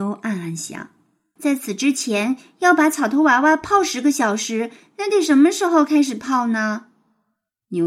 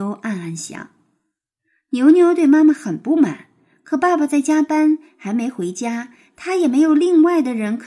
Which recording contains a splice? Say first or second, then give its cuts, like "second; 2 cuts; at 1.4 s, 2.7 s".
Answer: first; 1 cut; at 1.4 s